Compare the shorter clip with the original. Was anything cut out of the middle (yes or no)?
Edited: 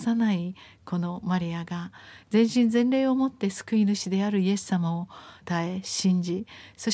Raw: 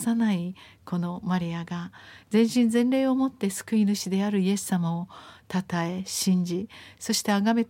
yes